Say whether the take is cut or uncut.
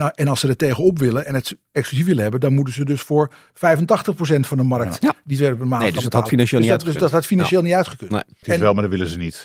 cut